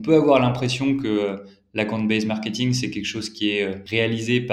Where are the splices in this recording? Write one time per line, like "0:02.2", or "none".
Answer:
none